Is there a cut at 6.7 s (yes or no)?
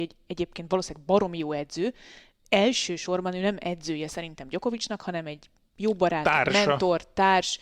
no